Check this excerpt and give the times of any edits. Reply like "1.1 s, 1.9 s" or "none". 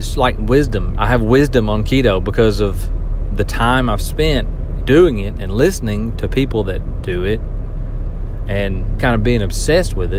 0.9 s, 4.8 s, 9.0 s